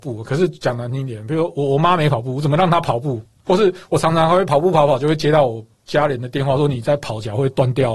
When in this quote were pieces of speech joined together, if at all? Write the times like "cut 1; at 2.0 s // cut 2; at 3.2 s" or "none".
none